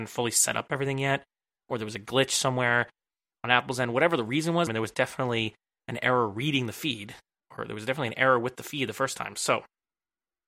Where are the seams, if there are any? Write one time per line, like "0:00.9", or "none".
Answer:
0:04.7